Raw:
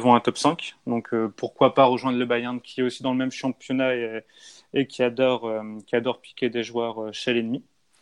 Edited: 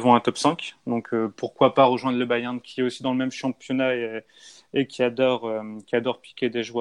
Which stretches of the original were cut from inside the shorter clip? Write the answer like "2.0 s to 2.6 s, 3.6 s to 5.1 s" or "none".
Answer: none